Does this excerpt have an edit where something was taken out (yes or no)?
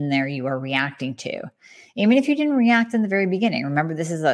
no